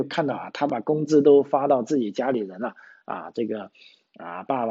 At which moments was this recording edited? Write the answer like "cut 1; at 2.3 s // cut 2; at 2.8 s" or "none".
none